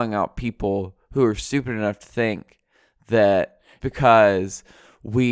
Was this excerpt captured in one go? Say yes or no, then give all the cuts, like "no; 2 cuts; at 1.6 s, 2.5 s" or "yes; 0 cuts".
no; 1 cut; at 3.8 s